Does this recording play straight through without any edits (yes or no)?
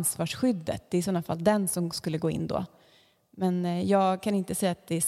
yes